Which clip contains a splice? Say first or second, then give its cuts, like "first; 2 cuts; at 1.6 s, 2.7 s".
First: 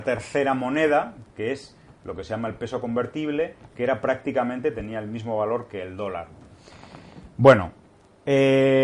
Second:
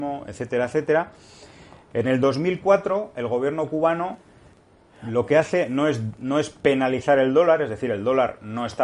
second; 1 cut; at 1.9 s